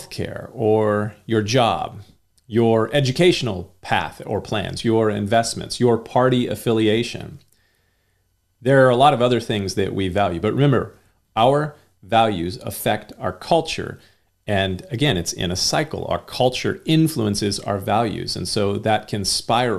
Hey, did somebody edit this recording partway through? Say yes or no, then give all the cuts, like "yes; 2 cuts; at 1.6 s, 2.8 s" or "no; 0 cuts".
yes; 1 cut; at 4.8 s